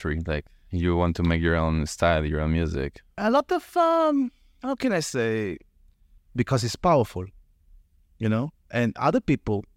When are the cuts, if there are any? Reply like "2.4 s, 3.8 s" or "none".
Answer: 6.2 s